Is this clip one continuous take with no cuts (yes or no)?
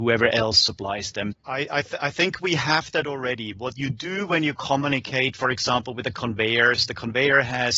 no